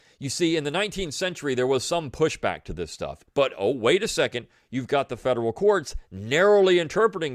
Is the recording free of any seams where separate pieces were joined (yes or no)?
no